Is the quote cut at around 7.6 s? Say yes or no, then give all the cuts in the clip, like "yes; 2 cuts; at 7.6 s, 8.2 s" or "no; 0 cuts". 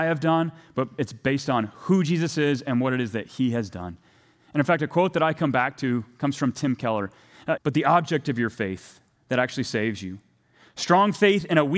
yes; 1 cut; at 7.6 s